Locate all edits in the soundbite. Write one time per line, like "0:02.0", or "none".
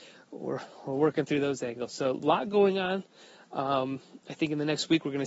none